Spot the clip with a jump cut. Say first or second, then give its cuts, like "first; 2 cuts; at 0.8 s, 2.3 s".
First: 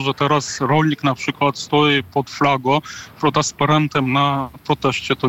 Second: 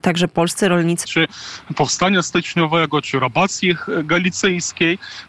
second; 1 cut; at 1.0 s